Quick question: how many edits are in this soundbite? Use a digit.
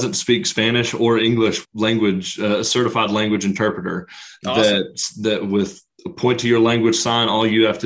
1